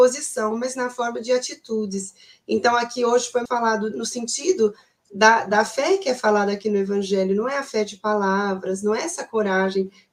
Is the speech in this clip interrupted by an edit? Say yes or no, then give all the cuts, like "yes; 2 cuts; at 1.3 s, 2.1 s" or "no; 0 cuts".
yes; 1 cut; at 3.5 s